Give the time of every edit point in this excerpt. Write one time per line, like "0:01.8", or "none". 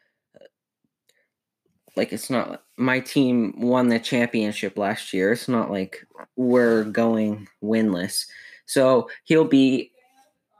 none

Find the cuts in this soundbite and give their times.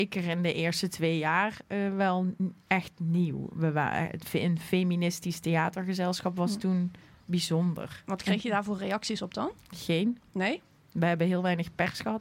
none

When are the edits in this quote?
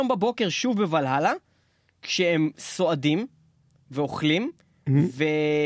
none

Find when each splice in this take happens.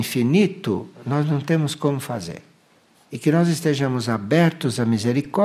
0:03.0

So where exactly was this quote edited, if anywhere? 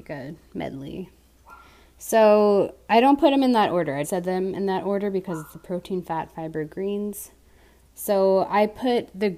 0:04.0

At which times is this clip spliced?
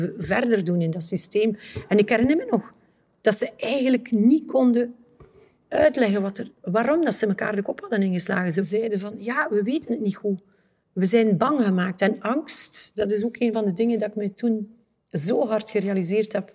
none

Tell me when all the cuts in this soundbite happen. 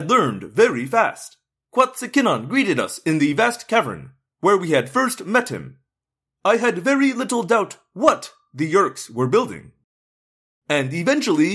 0:01.5
0:06.3

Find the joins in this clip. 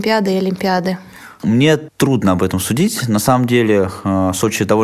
none

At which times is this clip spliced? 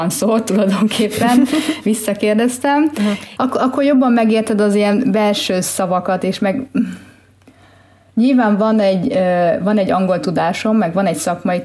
0:03.4

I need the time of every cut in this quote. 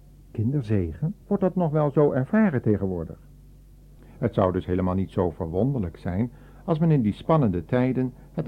0:01.2
0:04.0

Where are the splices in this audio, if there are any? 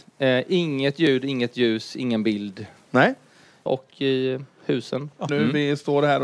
0:03.7
0:05.3

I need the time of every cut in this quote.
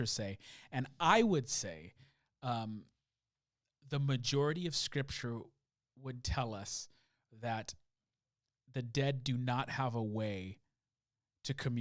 none

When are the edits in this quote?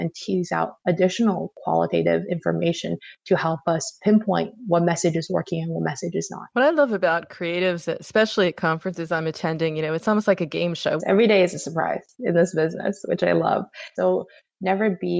0:11.0
0:13.9

